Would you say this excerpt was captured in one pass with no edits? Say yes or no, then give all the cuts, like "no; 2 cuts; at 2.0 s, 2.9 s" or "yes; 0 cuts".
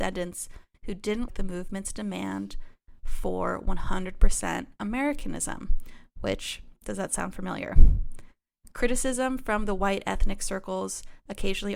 no; 1 cut; at 1.3 s